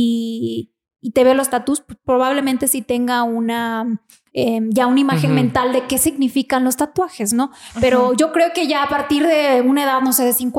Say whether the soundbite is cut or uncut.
uncut